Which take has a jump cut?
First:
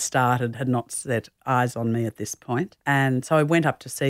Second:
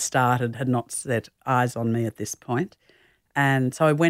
first; 1 cut; at 2.8 s

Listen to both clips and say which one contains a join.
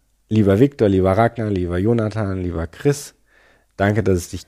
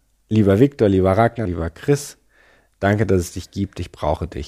second; 1 cut; at 1.5 s

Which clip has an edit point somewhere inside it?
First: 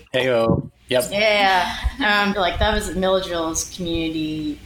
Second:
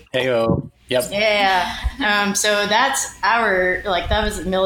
first; 1 cut; at 2.3 s

